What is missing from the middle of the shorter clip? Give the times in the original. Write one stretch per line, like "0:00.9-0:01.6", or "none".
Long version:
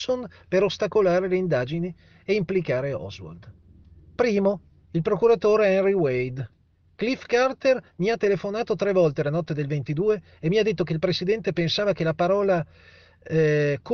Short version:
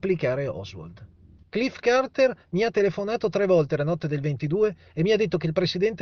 0:03.9-0:06.9